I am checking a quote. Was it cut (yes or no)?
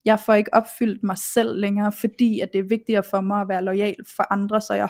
no